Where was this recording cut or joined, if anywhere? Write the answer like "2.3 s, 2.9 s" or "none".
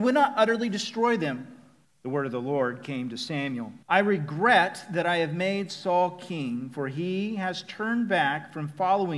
1.8 s, 3.8 s